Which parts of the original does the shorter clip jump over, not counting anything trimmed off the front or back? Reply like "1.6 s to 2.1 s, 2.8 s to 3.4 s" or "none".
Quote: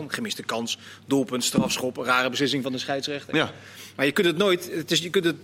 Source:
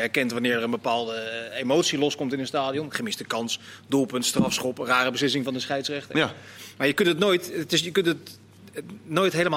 none

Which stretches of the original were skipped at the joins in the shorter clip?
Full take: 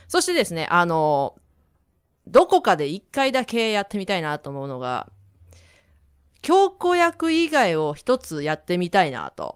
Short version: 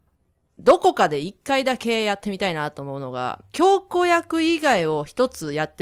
5.2 s to 6.4 s

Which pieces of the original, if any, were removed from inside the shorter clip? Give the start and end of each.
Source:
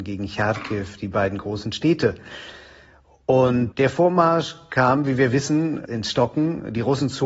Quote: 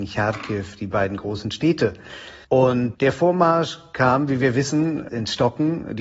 2.7 s to 3.2 s

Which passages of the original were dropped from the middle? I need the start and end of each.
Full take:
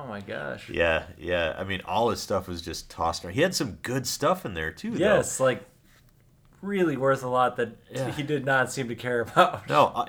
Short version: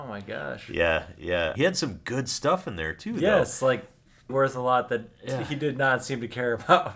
1.5 s to 3.3 s, 6.1 s to 7.0 s

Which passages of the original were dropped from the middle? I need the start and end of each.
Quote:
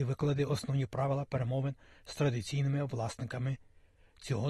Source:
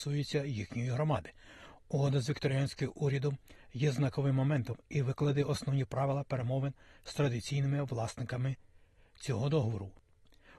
none

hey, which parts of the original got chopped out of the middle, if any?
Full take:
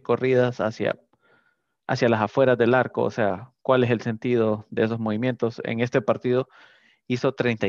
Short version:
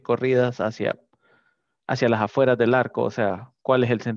none

